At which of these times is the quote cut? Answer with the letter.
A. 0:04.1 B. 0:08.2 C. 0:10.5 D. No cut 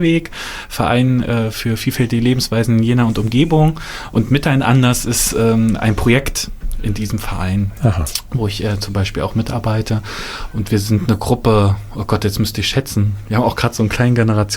D